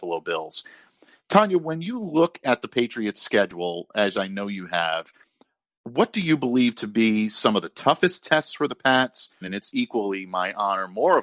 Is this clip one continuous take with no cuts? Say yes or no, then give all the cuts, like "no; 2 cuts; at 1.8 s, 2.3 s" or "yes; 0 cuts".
no; 1 cut; at 9.4 s